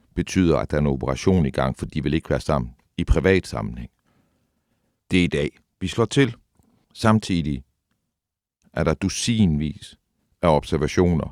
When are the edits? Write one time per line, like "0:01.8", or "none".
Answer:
0:05.0
0:06.8